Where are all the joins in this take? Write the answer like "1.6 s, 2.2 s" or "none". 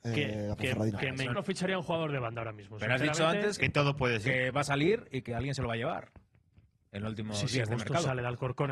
1.3 s, 3.6 s